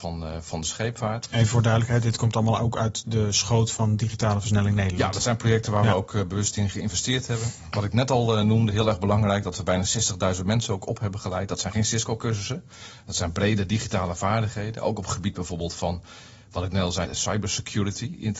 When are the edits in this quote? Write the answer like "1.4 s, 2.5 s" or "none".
17.1 s